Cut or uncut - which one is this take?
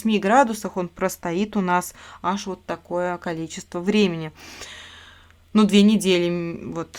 uncut